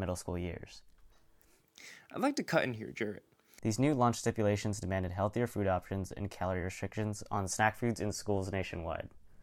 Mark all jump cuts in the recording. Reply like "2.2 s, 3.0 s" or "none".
3.6 s